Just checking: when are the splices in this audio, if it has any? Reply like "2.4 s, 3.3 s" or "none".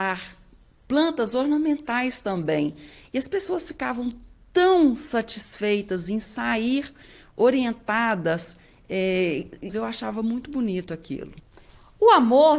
9.7 s